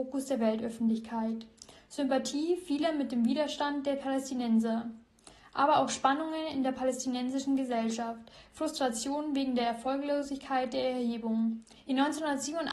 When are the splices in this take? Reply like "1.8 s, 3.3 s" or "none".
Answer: 11.8 s